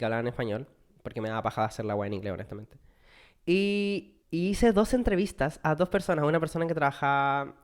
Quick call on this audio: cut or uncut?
cut